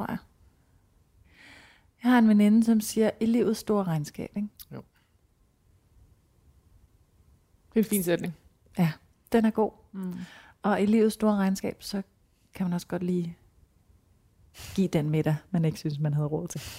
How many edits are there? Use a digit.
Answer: 0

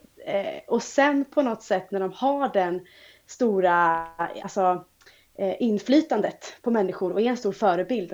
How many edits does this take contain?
0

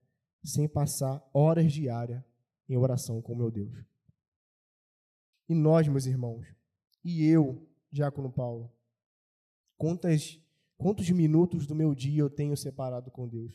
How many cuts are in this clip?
1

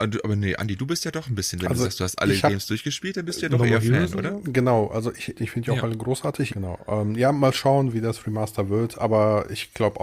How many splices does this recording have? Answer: 2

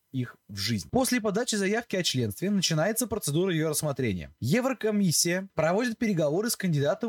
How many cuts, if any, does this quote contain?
2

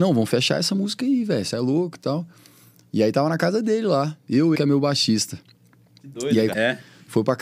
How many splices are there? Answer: 2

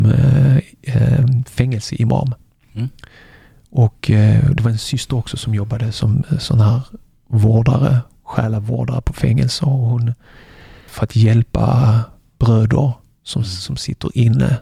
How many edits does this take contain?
1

